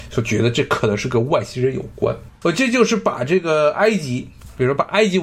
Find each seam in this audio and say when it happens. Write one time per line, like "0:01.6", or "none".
0:02.4

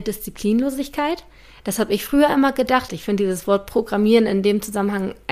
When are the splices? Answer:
0:02.9

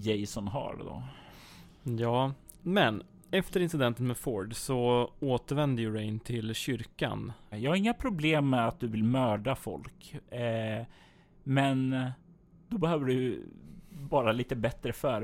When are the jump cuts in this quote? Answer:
0:02.6
0:07.5

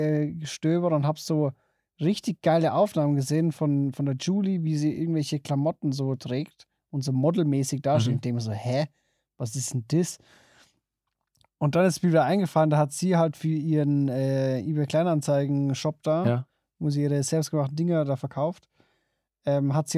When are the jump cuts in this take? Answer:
none

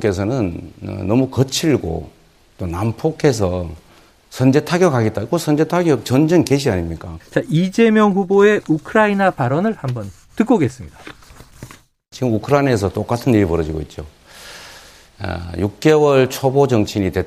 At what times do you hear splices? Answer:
0:07.2

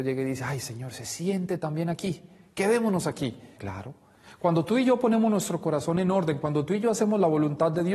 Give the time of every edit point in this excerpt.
0:03.6

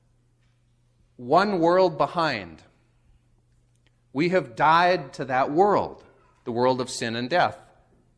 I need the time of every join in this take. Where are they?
none

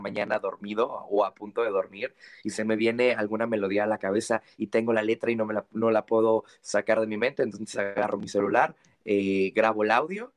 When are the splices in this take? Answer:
none

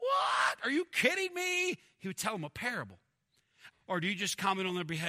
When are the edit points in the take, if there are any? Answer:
0:03.7

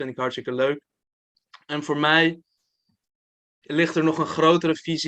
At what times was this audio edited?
none

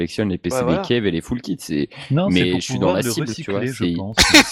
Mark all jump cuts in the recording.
none

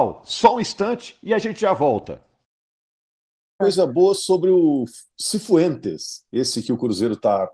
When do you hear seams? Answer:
0:03.6

